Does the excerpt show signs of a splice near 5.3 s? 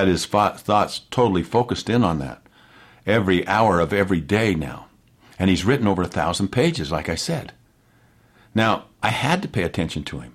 no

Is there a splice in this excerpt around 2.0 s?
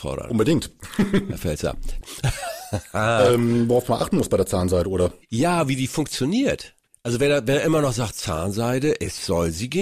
yes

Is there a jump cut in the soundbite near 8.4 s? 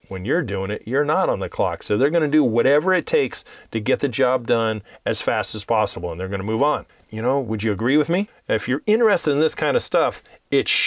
no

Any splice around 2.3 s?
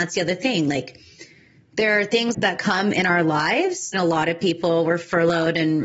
yes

